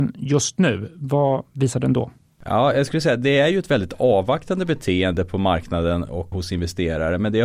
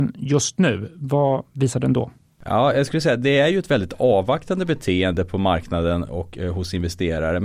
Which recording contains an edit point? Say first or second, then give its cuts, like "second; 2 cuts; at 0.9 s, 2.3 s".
first; 1 cut; at 6.3 s